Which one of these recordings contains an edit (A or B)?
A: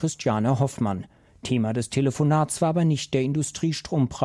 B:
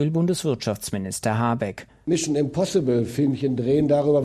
B